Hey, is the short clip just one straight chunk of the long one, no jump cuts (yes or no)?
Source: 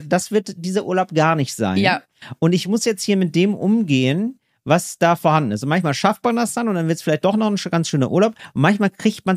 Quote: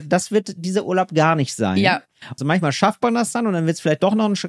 no